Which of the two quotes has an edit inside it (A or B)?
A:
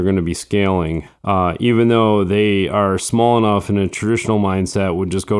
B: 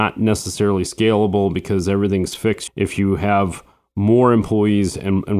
B